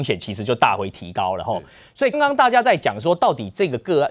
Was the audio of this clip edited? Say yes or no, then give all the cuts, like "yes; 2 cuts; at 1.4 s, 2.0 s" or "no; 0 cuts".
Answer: yes; 1 cut; at 2.1 s